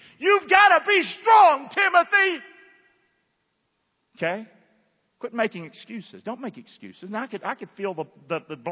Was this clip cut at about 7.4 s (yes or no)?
no